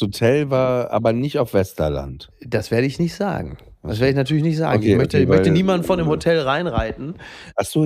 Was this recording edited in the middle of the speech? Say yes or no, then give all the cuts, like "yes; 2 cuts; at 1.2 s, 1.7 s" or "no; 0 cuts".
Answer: no; 0 cuts